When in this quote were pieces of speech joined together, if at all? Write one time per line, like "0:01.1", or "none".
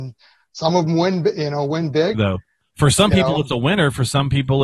0:02.1